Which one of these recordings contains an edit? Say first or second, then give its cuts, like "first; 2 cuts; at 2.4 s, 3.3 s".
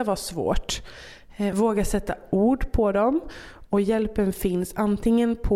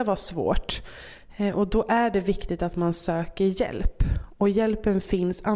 first; 2 cuts; at 1.5 s, 3.7 s